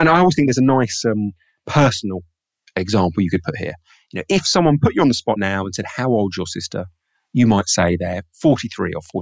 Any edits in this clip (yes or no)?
no